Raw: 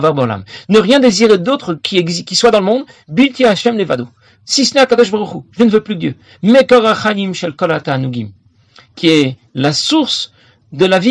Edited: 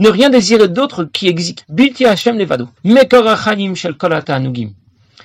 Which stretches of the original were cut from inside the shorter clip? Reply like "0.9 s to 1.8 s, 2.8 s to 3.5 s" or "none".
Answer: 2.3 s to 3.0 s, 4.2 s to 6.4 s

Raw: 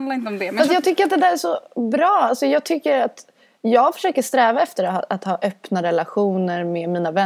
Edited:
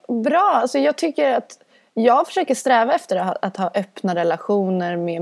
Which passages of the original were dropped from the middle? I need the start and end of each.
none

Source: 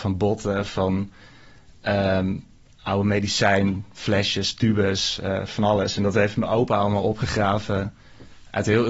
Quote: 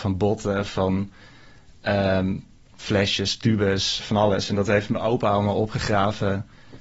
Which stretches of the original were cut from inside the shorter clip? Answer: 2.7 s to 3.9 s, 5.2 s to 5.5 s

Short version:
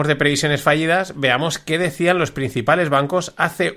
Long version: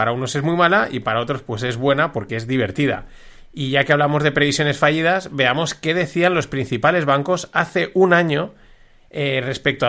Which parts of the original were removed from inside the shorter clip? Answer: none

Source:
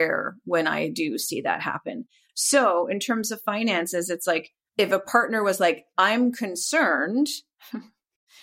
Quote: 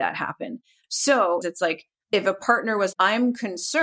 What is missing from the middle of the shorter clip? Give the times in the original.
2.9 s to 4.1 s, 5.6 s to 5.9 s

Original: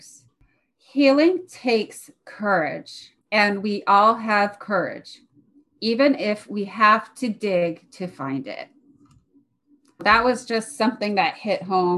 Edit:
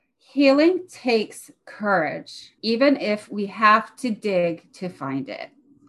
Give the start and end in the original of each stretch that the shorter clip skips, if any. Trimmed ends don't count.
3.2 s to 5.8 s

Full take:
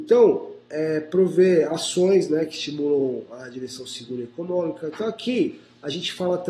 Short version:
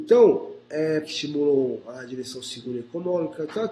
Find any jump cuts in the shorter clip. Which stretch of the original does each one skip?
1.0 s to 2.5 s

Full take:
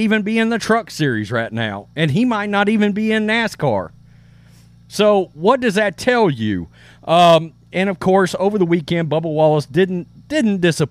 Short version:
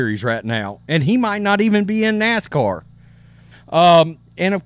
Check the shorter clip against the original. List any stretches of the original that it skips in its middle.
4.6 s to 6.9 s

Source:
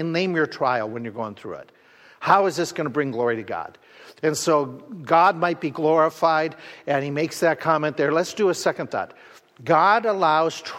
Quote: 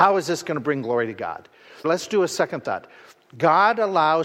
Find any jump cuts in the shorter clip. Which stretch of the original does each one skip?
4.1 s to 8.1 s

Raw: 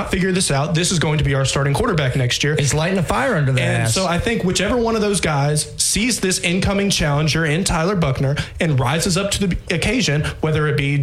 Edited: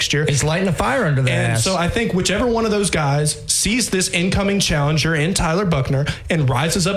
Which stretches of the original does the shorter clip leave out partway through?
none

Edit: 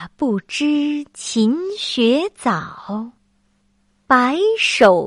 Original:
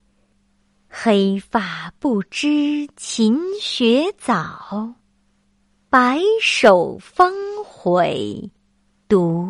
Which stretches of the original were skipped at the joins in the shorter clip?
none

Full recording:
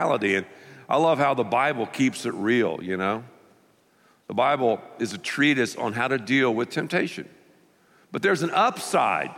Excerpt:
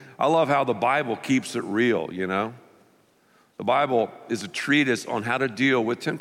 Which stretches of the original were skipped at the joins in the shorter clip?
none

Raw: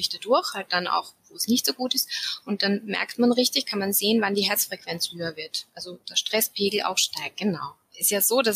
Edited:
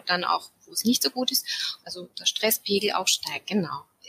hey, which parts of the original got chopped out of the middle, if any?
2.4 s to 5.7 s

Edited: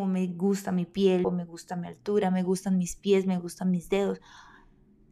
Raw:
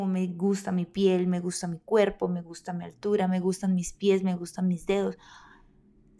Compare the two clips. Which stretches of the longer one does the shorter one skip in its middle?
1.2 s to 2.2 s

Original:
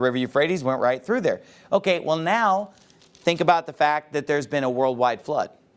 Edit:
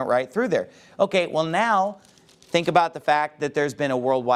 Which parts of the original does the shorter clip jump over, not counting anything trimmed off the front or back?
none

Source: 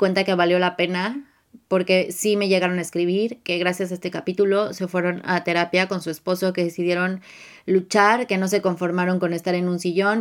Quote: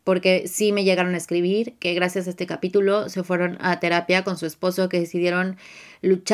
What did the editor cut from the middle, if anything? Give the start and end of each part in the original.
none

